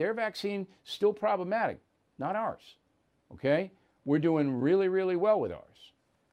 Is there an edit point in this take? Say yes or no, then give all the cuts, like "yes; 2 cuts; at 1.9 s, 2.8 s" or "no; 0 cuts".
no; 0 cuts